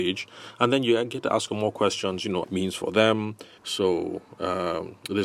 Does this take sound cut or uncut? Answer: cut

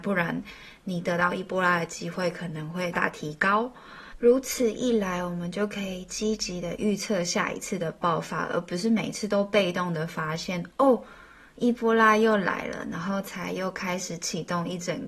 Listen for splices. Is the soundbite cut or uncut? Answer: cut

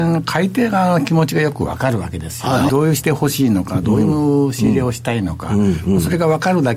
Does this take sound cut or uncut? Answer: cut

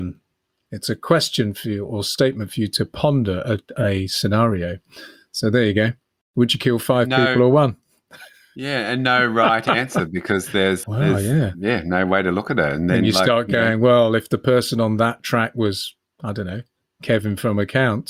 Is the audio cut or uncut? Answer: cut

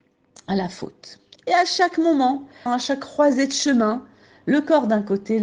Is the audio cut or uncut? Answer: cut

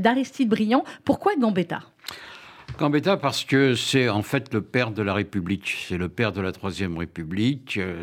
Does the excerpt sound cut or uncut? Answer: uncut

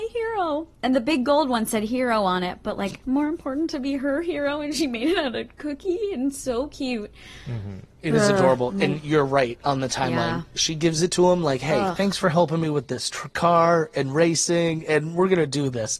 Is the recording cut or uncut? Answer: uncut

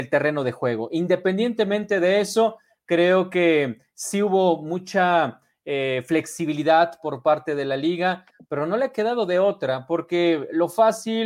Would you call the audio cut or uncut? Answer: uncut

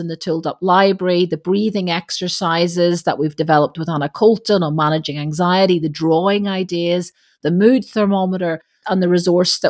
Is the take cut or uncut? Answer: uncut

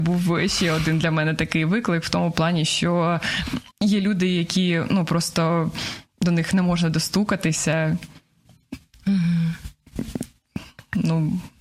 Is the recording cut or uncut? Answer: cut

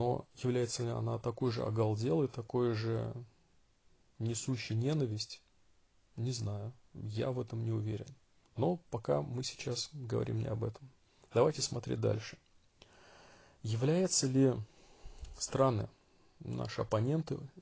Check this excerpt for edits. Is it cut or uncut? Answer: uncut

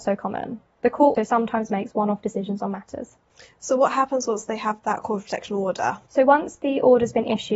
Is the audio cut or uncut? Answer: cut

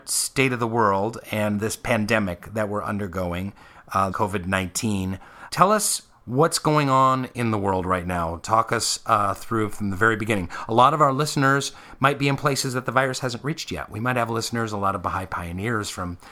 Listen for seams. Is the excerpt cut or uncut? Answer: cut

